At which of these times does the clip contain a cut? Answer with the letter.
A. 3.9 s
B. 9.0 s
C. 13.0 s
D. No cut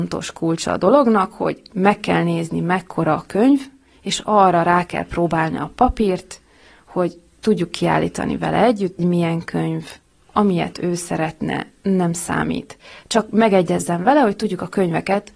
B